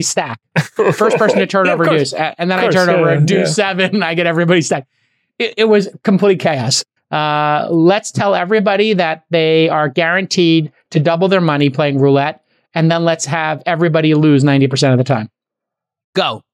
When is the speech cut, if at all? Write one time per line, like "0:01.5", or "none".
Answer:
0:07.0

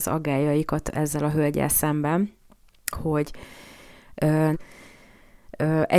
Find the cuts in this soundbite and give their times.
0:02.9
0:04.5

